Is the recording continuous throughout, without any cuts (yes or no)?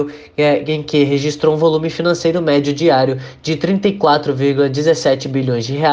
yes